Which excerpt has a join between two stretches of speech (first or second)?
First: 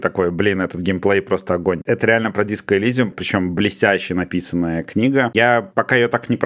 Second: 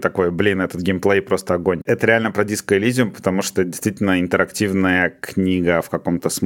first